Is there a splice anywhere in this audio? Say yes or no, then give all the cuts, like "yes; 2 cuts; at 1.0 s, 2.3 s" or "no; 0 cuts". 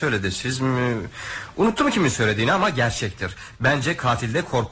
no; 0 cuts